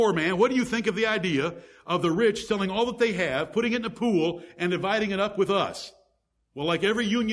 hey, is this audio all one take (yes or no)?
yes